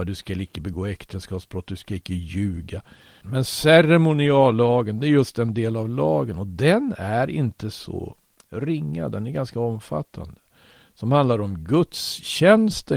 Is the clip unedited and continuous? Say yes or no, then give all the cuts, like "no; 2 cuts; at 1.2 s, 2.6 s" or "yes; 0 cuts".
no; 1 cut; at 3.2 s